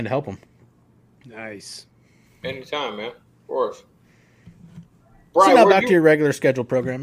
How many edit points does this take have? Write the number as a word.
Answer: zero